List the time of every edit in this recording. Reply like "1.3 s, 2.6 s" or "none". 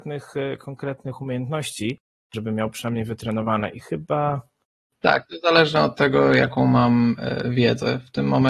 none